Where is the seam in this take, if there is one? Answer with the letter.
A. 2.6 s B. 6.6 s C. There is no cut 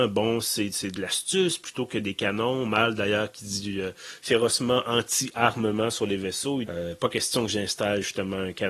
B